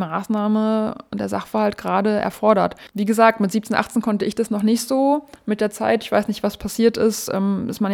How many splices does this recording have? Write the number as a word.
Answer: zero